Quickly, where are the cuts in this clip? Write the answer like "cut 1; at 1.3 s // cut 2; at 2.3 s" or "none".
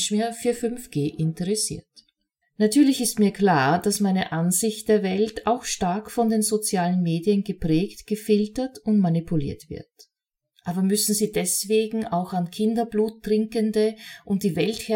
cut 1; at 2.4 s // cut 2; at 10.5 s